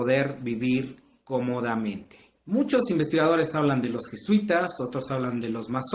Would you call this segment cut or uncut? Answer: cut